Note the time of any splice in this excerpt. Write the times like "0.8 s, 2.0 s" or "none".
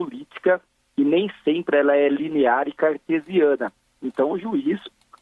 none